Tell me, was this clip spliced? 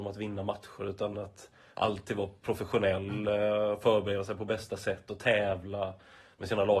no; 0 cuts

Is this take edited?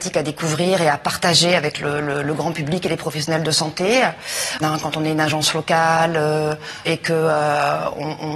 yes; 2 cuts; at 4.6 s, 6.9 s

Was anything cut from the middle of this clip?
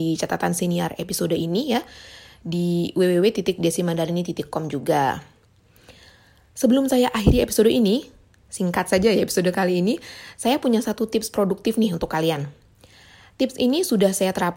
no; 0 cuts

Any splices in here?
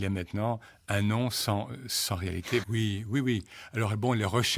yes; 1 cut; at 2.6 s

